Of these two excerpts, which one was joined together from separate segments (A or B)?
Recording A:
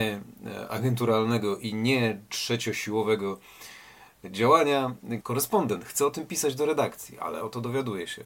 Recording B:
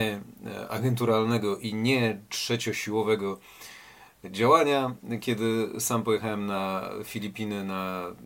A